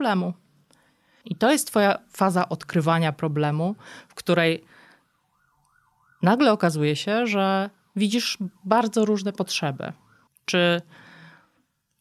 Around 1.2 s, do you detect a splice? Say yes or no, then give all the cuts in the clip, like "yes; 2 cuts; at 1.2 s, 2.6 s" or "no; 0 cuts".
yes; 2 cuts; at 1.2 s, 10.3 s